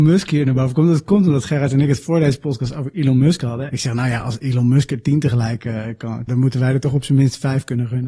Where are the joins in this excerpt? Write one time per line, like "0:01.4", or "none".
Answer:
0:03.7
0:06.3